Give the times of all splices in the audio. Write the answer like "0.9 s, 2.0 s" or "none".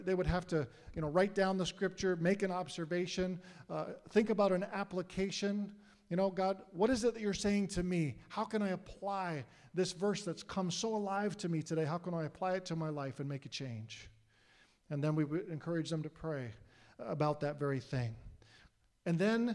none